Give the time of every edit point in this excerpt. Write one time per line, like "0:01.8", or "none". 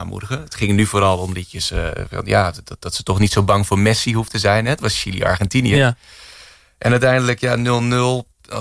none